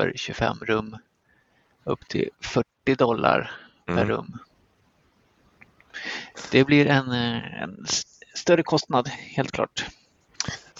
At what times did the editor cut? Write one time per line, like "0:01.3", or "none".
none